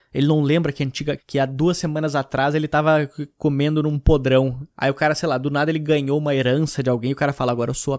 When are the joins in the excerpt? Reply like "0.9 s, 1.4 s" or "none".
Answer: 1.2 s, 4.7 s